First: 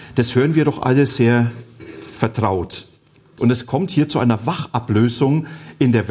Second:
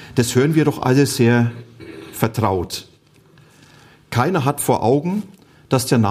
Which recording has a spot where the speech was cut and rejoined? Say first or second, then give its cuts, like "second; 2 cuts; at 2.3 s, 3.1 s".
first; 1 cut; at 3.4 s